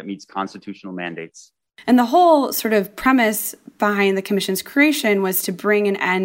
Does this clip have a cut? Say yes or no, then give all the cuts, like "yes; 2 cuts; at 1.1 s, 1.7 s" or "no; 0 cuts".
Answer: no; 0 cuts